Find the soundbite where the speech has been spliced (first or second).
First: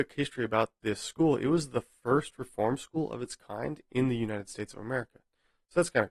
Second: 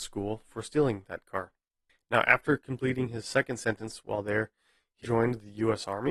second